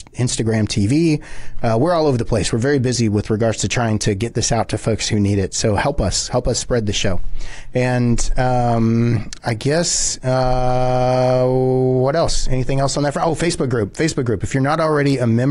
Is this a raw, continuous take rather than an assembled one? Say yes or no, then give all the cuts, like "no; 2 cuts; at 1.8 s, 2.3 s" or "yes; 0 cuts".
yes; 0 cuts